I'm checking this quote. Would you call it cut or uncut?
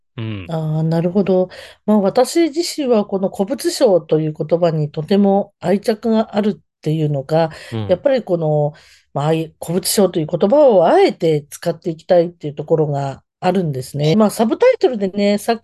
cut